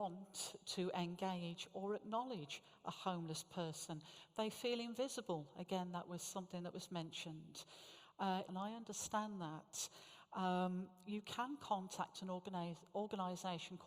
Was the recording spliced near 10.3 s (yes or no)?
no